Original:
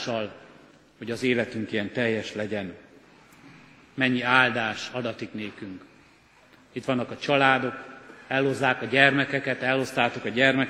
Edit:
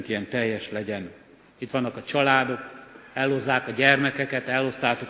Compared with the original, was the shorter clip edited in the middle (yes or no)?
yes